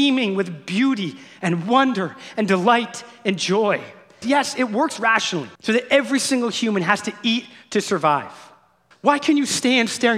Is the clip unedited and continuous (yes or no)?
no